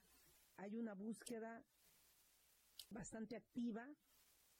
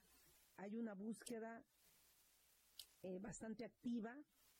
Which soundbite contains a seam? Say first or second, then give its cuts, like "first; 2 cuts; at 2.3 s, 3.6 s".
first; 1 cut; at 2.9 s